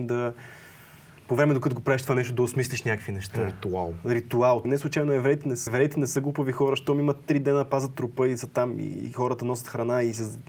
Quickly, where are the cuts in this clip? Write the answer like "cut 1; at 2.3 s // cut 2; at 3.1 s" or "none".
cut 1; at 1.2 s // cut 2; at 4.6 s // cut 3; at 5.7 s